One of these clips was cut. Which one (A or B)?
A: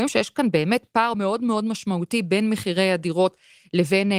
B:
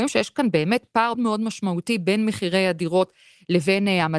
B